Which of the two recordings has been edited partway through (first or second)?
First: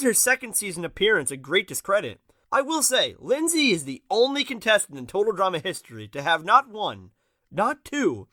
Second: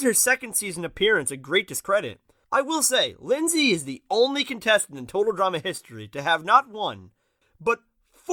second